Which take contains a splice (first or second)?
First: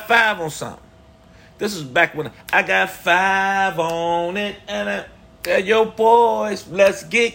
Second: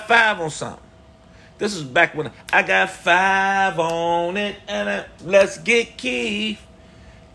second